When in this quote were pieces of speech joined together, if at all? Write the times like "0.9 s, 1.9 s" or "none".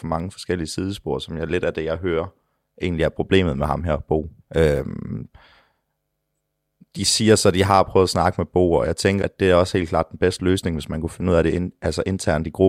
4.4 s, 9.2 s